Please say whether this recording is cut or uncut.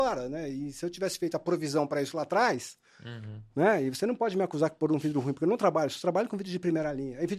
uncut